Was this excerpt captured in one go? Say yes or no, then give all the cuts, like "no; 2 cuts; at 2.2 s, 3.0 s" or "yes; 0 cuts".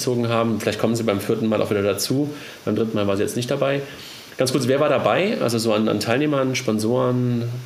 yes; 0 cuts